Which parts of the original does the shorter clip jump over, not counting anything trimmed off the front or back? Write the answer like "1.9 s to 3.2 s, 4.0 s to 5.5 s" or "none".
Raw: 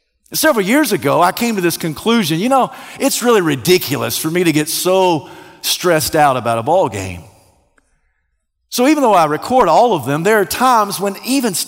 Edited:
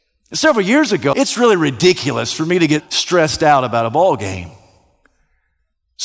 1.1 s to 3.0 s, 4.6 s to 5.5 s